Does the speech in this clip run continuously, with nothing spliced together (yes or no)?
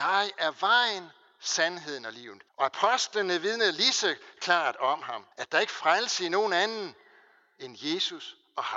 no